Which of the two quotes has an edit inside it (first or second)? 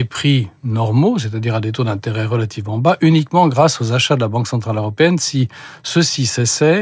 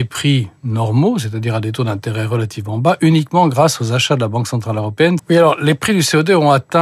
second